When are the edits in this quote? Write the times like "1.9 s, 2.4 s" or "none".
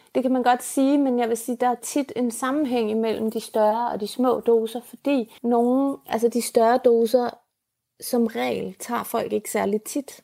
5.4 s